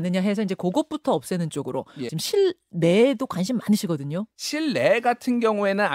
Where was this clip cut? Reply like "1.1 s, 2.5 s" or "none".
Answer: 2.1 s